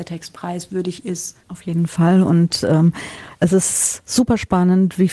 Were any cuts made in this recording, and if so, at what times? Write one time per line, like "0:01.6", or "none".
none